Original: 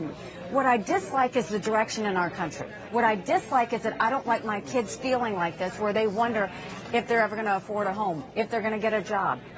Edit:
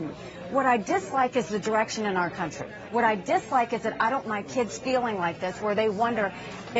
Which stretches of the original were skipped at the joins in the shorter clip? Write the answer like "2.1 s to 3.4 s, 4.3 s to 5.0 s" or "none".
4.2 s to 4.4 s